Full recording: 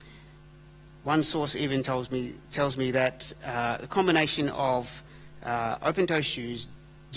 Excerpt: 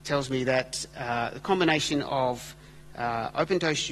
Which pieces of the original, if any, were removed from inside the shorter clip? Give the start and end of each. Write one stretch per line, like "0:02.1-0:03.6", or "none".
none